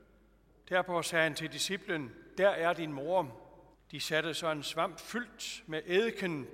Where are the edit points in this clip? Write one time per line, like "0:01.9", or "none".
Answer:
0:03.7